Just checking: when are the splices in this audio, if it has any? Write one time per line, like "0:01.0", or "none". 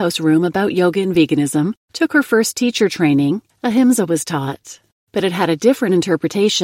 none